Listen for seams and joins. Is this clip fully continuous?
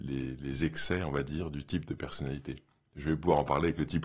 yes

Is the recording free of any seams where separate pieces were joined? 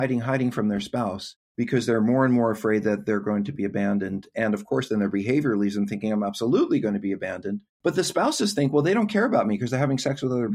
yes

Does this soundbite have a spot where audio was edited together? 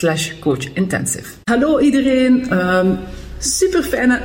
yes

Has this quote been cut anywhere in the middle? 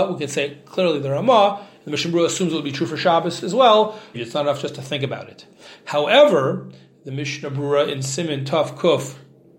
yes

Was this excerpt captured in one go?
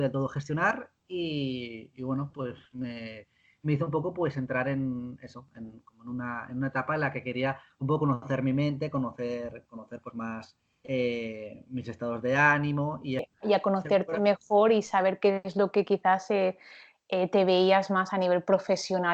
yes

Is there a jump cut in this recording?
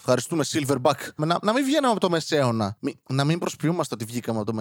yes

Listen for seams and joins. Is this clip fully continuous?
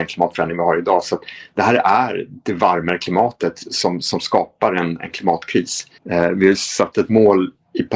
no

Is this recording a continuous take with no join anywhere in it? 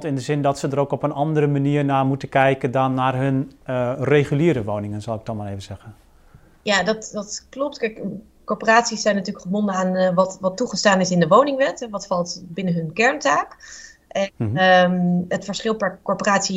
yes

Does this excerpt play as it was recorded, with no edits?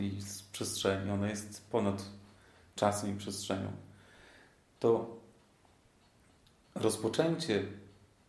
yes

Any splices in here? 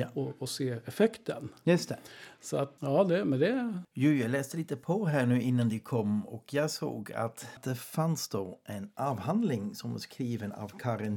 no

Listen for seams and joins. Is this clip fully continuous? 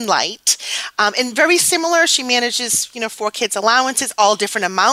yes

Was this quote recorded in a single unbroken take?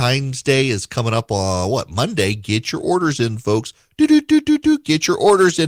yes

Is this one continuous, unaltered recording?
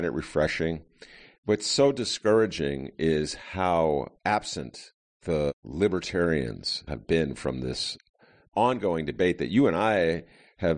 no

